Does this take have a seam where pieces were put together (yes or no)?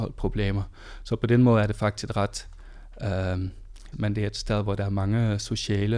yes